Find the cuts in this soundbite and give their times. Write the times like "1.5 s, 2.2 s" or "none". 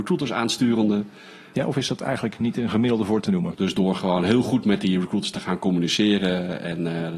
1.5 s, 3.5 s